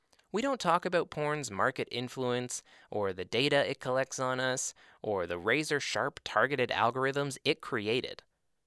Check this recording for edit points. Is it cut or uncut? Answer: uncut